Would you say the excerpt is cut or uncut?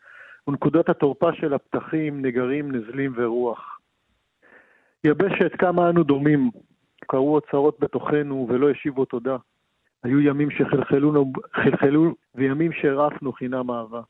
cut